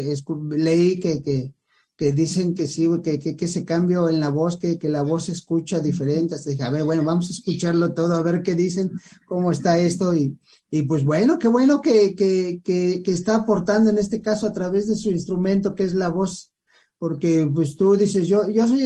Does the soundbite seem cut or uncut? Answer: uncut